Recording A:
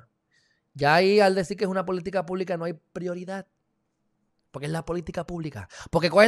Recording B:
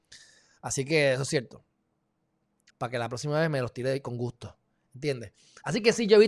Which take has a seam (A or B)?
B